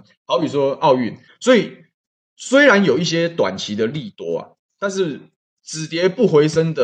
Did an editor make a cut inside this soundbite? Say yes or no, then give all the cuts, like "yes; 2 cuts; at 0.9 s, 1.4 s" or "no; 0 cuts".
yes; 1 cut; at 1.3 s